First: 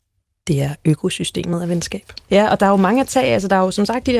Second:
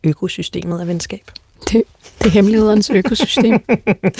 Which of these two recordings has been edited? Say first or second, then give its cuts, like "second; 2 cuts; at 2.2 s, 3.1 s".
first; 1 cut; at 2.3 s